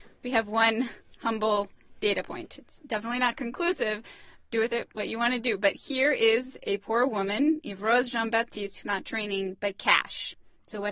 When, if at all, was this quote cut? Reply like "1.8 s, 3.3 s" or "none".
8.8 s

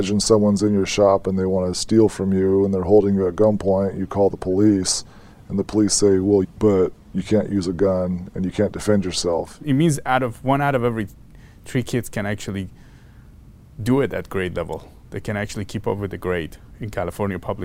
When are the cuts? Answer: 6.4 s, 9.6 s

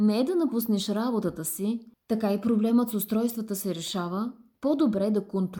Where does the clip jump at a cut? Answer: 1.9 s, 4.5 s

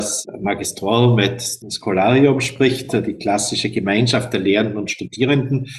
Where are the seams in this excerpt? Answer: none

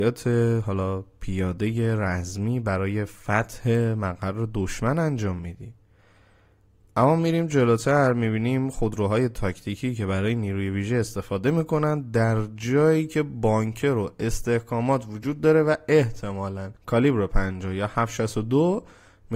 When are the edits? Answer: 16.8 s

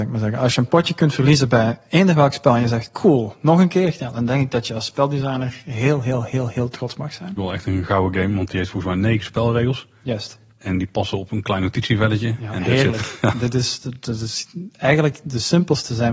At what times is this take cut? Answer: 7.4 s

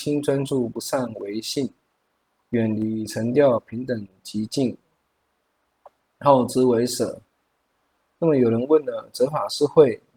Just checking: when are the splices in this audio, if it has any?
none

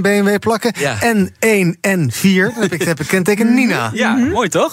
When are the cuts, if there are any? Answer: none

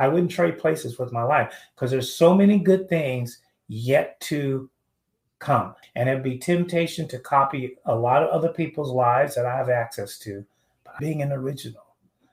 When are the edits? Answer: 5.8 s, 11.0 s

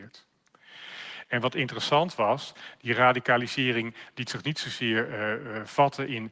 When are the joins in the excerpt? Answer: none

